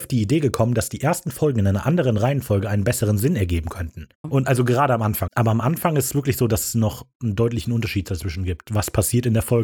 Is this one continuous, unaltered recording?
no; 2 cuts; at 4.2 s, 5.3 s

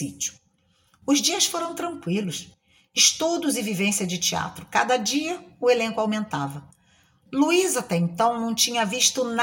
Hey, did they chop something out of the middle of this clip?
no; 0 cuts

